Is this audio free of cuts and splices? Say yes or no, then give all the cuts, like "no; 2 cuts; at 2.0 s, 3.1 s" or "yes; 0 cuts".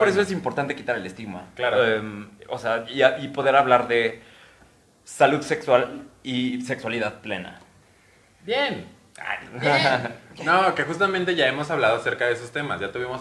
yes; 0 cuts